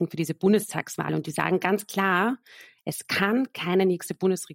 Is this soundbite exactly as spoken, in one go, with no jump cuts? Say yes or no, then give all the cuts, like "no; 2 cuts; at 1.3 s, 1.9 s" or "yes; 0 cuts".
yes; 0 cuts